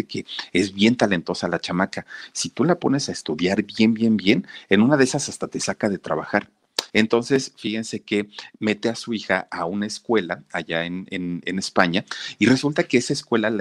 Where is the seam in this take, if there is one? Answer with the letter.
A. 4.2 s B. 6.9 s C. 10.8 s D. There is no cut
B